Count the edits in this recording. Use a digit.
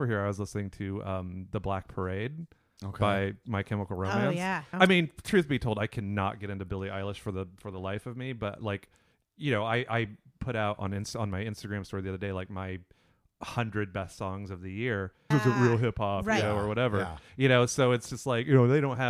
2